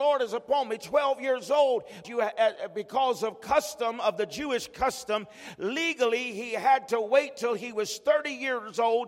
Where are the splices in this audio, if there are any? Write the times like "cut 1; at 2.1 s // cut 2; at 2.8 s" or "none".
cut 1; at 2.0 s